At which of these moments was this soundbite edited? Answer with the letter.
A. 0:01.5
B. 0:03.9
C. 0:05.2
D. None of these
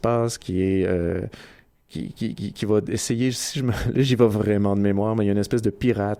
D